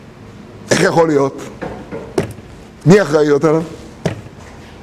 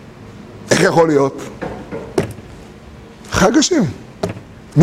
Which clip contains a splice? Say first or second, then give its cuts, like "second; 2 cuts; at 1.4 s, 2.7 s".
first; 1 cut; at 2.7 s